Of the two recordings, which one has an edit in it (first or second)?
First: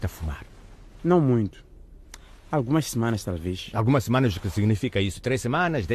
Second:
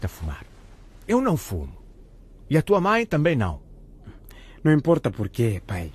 first